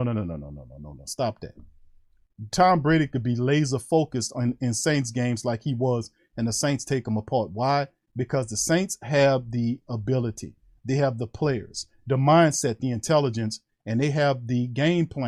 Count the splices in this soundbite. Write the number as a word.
zero